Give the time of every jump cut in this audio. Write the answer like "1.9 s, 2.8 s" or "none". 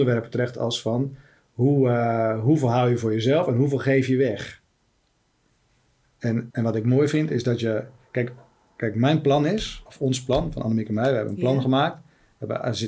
6.5 s